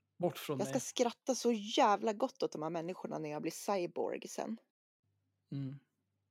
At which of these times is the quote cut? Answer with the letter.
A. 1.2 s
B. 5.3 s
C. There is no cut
C